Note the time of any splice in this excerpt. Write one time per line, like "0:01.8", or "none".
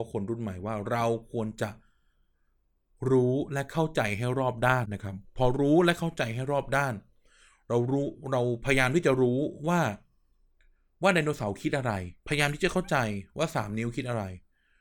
0:04.8
0:12.2